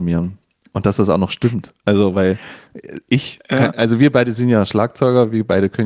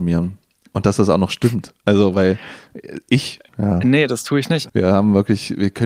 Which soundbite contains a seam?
second; 2 cuts; at 3.5 s, 4.7 s

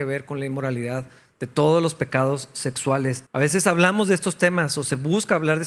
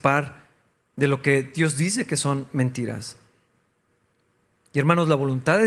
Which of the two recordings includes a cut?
first; 1 cut; at 3.3 s

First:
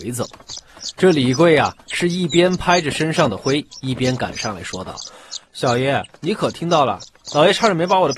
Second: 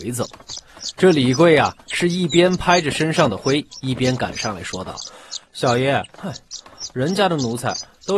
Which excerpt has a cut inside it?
second; 1 cut; at 6.2 s

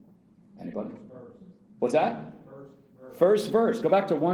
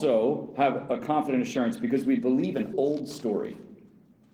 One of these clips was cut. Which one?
second; 1 cut; at 2.7 s

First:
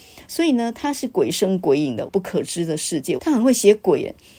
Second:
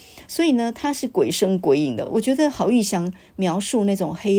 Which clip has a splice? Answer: first; 2 cuts; at 2.1 s, 3.2 s

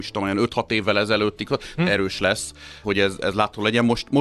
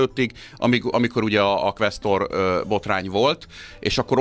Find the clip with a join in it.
first; 2 cuts; at 1.8 s, 2.8 s

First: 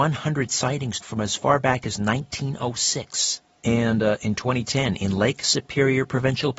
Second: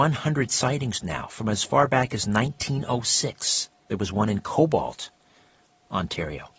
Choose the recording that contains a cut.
first; 2 cuts; at 1.0 s, 3.5 s

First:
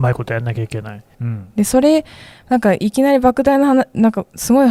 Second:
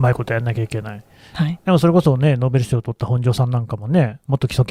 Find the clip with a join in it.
first; 1 cut; at 1.1 s

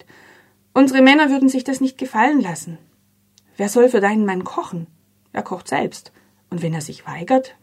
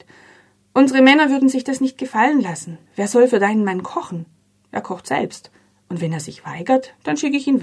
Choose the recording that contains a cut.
second; 1 cut; at 2.9 s

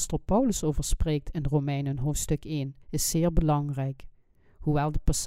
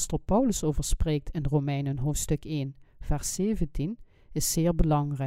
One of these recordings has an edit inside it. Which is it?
first; 1 cut; at 2.8 s

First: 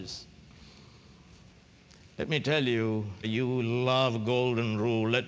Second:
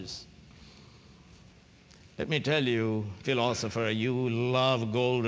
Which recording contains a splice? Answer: first; 1 cut; at 3.2 s

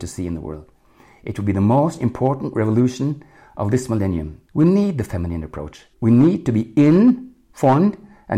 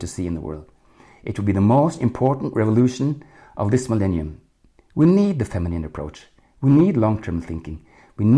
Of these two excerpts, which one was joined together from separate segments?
first; 2 cuts; at 4.5 s, 5.9 s

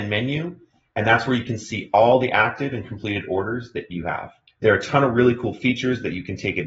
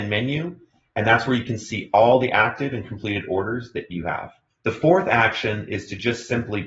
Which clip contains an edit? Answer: first; 1 cut; at 4.5 s

